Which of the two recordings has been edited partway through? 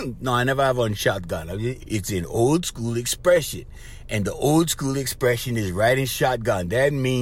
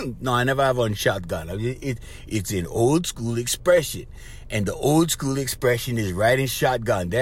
first; 1 cut; at 1.8 s

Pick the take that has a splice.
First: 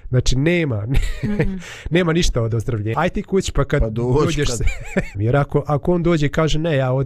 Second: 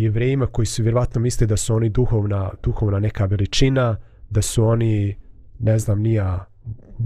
first; 2 cuts; at 2.9 s, 5.1 s

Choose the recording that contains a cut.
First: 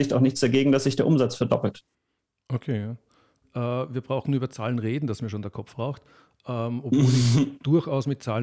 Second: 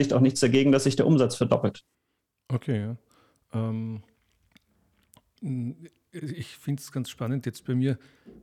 first; 1 cut; at 3.4 s

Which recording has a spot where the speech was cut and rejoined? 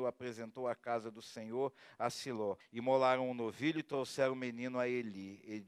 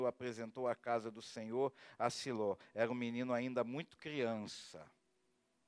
first; 1 cut; at 2.6 s

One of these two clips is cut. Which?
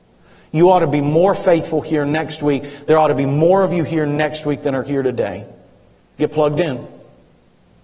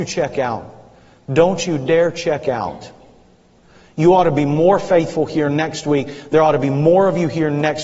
first; 1 cut; at 6.0 s

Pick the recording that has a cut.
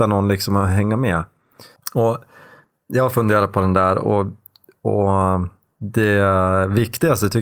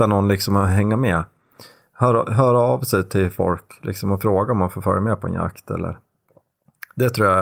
first; 1 cut; at 1.8 s

